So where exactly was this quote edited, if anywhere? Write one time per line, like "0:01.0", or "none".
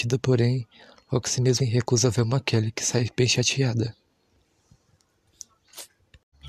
0:01.6